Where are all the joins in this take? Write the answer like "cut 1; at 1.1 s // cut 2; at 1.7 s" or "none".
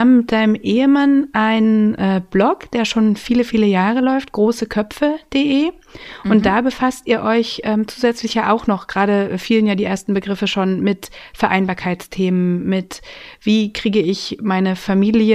none